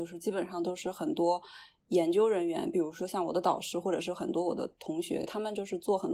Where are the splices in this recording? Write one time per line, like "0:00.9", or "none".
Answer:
none